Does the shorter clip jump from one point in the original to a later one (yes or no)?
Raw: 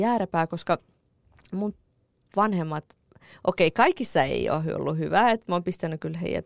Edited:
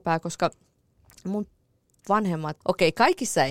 yes